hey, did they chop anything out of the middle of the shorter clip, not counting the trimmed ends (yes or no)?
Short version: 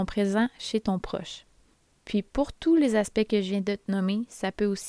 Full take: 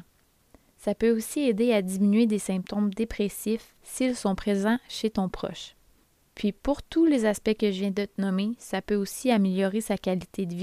no